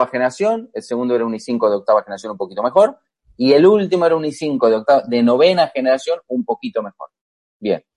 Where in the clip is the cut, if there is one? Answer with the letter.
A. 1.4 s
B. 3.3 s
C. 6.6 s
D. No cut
D